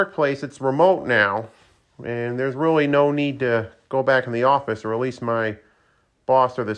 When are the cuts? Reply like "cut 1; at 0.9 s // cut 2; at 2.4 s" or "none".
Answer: none